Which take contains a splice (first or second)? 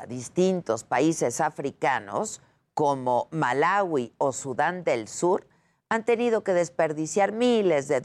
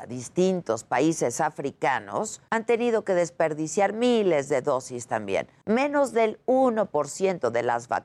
second